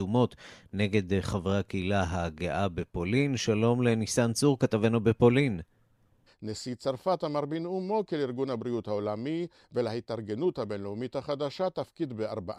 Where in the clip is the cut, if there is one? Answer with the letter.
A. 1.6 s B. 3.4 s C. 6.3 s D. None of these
C